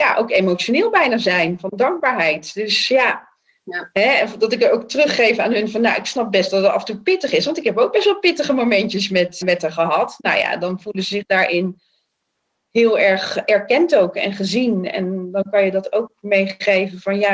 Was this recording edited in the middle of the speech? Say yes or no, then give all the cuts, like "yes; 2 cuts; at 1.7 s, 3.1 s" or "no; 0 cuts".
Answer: yes; 1 cut; at 9.4 s